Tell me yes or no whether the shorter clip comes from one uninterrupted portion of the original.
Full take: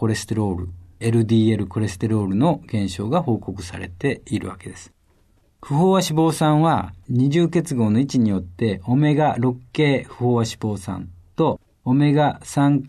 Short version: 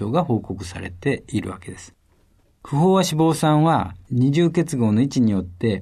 yes